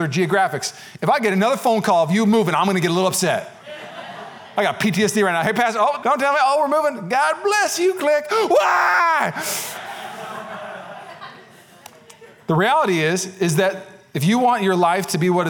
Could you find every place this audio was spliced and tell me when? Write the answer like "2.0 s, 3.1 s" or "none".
6.0 s